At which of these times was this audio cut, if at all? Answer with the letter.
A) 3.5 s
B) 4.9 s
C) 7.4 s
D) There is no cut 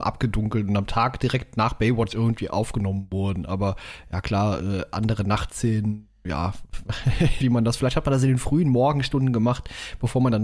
C